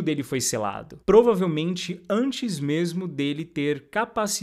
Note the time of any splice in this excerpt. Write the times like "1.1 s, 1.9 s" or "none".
none